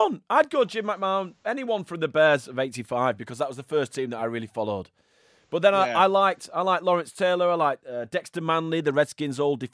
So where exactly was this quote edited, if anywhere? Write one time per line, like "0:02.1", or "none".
none

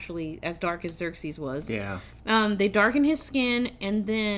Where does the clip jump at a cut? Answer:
none

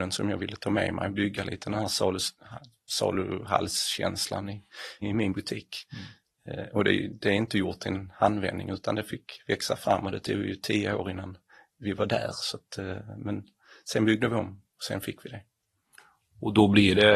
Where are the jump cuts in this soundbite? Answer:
0:05.0

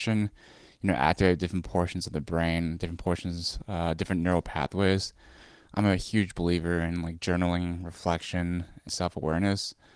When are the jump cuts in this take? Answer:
0:05.7
0:08.9

